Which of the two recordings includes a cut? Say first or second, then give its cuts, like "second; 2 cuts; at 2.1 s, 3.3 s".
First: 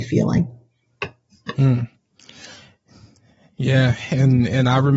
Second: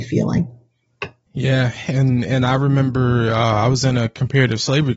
second; 1 cut; at 1.3 s